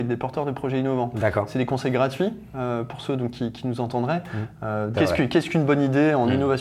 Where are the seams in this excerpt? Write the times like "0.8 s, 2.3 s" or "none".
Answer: 4.9 s